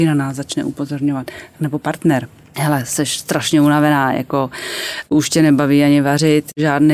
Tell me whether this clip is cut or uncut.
uncut